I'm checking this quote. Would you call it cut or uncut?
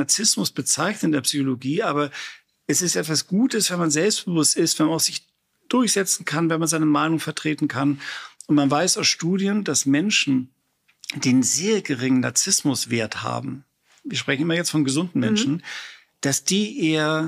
uncut